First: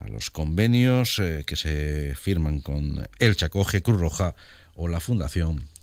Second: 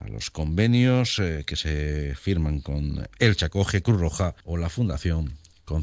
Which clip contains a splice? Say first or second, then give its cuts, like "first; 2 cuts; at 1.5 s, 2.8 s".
second; 1 cut; at 4.4 s